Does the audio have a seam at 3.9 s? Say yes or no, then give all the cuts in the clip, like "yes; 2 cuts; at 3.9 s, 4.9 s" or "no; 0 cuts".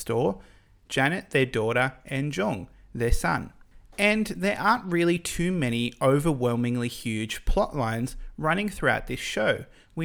no; 0 cuts